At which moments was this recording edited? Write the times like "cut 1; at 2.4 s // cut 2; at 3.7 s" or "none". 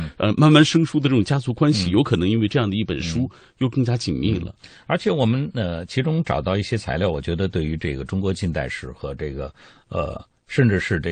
none